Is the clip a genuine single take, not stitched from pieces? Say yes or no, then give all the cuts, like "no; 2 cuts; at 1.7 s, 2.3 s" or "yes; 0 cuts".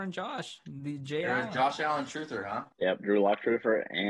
no; 1 cut; at 2.7 s